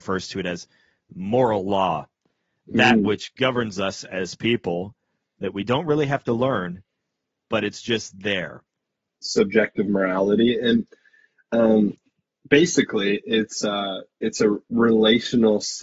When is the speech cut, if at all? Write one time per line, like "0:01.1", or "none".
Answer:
0:09.2

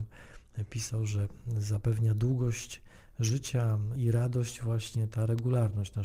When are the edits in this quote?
0:04.0

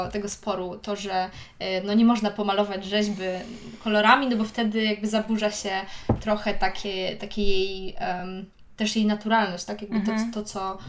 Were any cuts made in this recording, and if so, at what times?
none

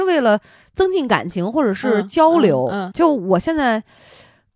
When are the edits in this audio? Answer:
0:02.9

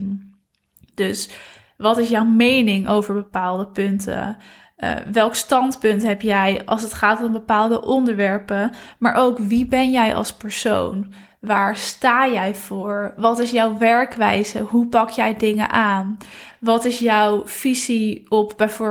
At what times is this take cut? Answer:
none

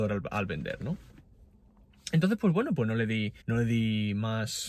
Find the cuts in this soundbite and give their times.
0:03.4

